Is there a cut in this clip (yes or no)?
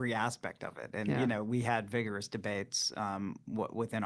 no